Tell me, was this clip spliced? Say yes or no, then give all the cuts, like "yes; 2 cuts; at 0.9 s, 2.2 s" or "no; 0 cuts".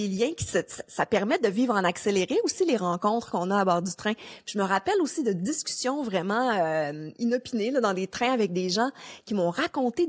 no; 0 cuts